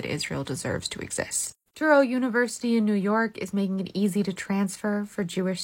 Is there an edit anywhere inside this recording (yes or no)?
yes